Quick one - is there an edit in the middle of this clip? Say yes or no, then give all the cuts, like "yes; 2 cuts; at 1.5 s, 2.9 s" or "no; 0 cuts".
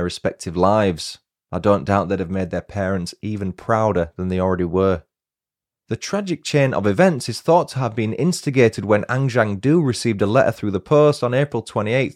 no; 0 cuts